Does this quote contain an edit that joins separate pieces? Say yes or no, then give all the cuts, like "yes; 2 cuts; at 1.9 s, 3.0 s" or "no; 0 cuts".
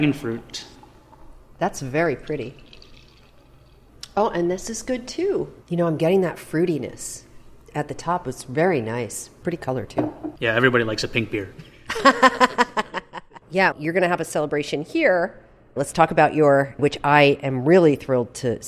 yes; 2 cuts; at 13.7 s, 16.8 s